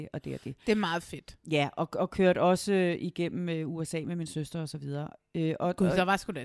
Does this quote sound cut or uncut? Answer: uncut